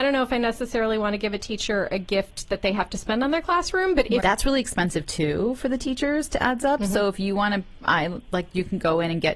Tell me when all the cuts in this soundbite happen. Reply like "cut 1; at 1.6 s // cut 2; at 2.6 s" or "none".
cut 1; at 4.2 s